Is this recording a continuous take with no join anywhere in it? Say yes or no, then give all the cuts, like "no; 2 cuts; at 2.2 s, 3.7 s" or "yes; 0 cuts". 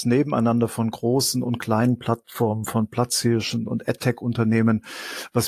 no; 1 cut; at 3.7 s